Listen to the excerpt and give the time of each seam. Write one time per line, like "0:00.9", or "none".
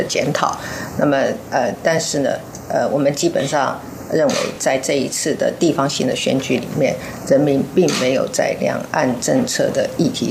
none